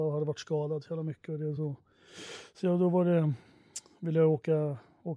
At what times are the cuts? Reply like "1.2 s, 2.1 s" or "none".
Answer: none